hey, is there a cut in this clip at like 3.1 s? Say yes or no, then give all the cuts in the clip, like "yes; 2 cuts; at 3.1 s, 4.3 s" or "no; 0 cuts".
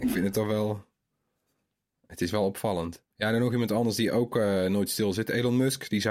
yes; 1 cut; at 3.1 s